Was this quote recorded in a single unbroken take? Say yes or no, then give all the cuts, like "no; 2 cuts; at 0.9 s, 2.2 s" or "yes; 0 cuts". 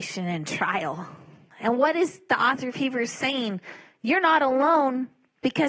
yes; 0 cuts